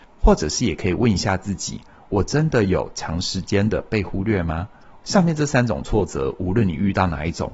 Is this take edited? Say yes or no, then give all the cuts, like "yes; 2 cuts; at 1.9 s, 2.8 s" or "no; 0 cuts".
yes; 1 cut; at 5.0 s